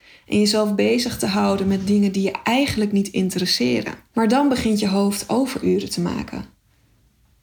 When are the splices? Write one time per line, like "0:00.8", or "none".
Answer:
0:04.1